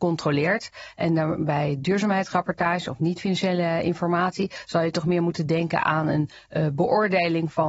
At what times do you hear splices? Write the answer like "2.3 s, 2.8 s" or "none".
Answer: none